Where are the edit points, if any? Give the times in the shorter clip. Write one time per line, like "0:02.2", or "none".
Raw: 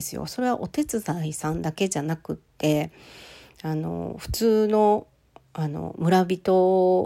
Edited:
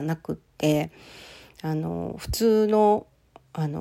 none